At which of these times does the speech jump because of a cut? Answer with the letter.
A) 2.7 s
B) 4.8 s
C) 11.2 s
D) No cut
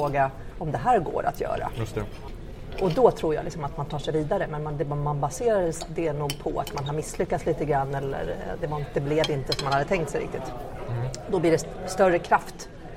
D